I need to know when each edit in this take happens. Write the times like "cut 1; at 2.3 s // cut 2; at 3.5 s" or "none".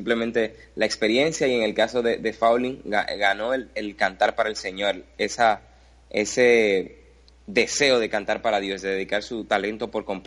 none